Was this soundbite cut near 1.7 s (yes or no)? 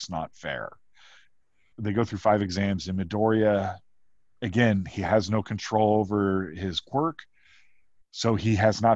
yes